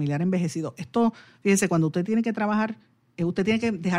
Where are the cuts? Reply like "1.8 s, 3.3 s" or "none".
none